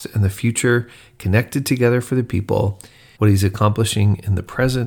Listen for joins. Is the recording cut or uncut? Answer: cut